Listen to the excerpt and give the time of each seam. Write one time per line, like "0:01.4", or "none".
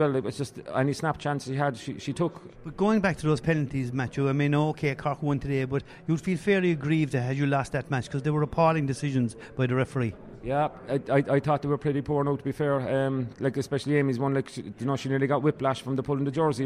0:02.5